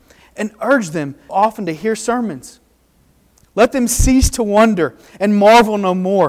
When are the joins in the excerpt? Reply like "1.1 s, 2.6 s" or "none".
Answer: 1.3 s